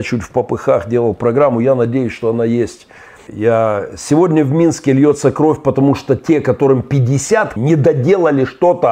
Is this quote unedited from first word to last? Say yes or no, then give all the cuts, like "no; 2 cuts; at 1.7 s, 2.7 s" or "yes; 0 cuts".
no; 2 cuts; at 3.3 s, 7.6 s